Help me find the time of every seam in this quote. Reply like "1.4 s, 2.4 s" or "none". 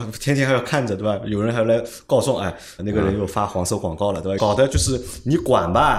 2.8 s, 4.4 s